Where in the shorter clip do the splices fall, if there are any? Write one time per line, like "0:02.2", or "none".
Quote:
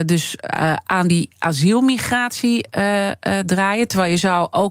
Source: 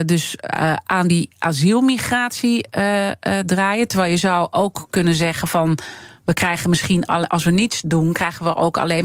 none